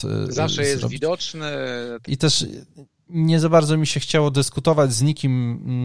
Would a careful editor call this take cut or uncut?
cut